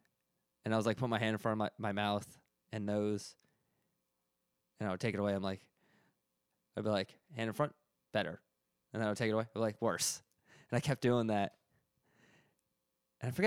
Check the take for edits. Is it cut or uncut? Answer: uncut